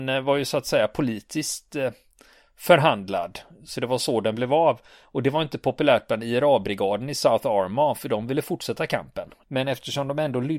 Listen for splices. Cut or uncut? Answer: cut